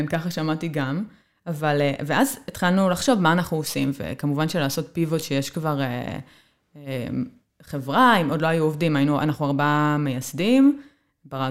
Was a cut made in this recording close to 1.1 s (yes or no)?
no